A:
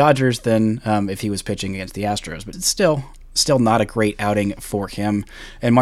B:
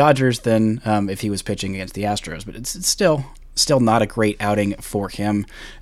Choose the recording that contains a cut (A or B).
A